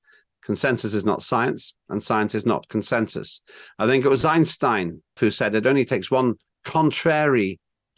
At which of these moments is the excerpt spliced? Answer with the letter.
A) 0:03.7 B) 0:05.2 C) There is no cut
B